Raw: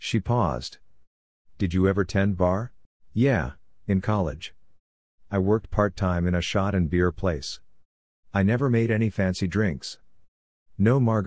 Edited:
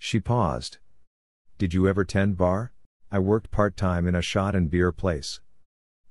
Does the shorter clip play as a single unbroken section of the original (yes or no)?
no